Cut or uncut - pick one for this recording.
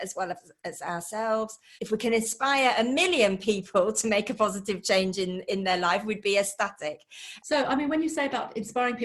cut